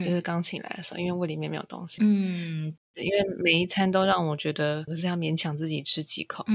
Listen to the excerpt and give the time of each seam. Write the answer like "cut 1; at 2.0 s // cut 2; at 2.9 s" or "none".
cut 1; at 2.0 s // cut 2; at 4.9 s